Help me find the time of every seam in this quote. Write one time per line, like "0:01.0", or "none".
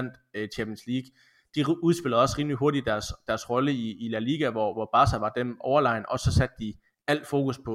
none